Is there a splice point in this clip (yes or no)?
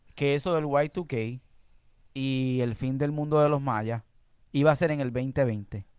no